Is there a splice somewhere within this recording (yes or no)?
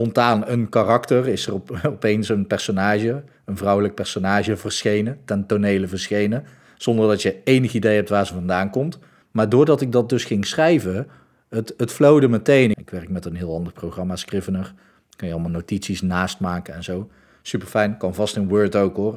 yes